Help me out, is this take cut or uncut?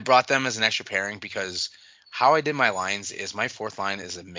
uncut